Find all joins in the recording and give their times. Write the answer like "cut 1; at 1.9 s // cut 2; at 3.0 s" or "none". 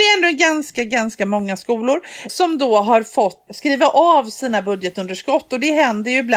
cut 1; at 2.3 s // cut 2; at 3.5 s